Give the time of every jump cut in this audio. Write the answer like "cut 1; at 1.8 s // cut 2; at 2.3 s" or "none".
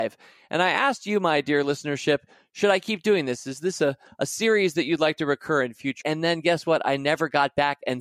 cut 1; at 6.0 s